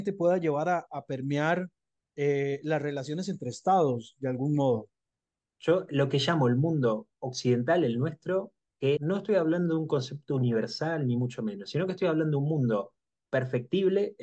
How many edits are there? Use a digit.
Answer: 2